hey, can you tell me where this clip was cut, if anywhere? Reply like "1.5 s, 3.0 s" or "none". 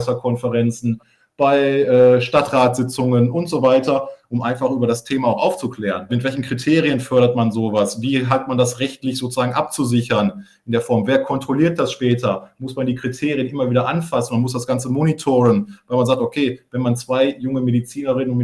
6.1 s